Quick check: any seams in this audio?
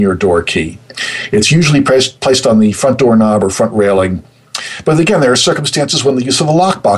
no; 0 cuts

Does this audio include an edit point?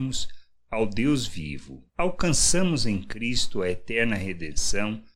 yes; 1 cut; at 1.9 s

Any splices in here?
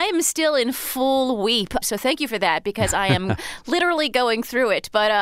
yes; 1 cut; at 1.8 s

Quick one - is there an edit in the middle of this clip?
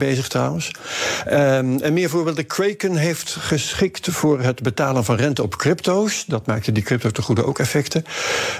no; 0 cuts

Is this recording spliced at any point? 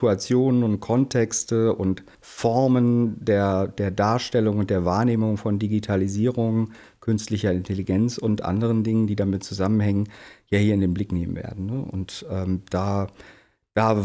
no; 0 cuts

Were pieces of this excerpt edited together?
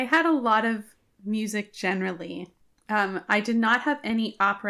no; 0 cuts

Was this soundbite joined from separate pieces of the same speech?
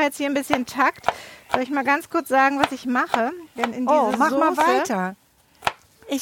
no; 0 cuts

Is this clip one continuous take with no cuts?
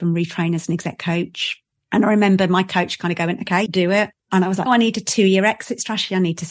no; 2 cuts; at 3.7 s, 4.7 s

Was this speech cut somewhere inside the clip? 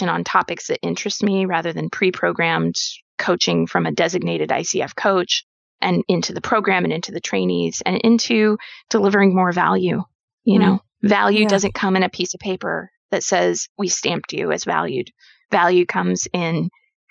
no; 0 cuts

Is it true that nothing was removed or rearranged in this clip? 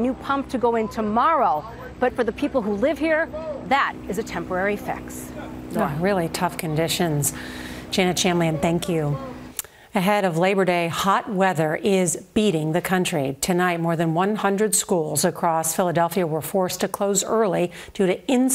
no; 1 cut; at 2.1 s

